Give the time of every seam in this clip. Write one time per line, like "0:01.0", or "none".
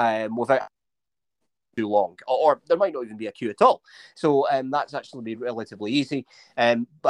none